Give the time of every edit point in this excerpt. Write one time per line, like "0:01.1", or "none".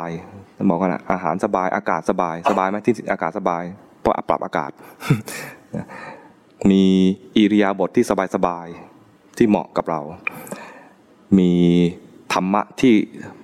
none